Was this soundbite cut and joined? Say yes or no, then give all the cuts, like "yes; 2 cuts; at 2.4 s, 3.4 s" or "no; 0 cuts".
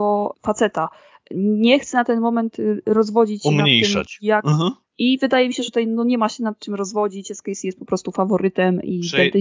yes; 1 cut; at 4.8 s